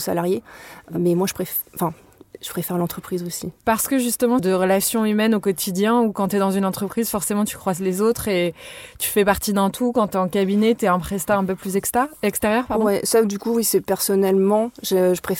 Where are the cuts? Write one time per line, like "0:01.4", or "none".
0:04.4